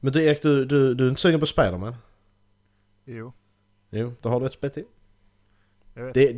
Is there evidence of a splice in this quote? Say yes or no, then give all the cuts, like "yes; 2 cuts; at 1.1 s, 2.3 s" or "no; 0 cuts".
no; 0 cuts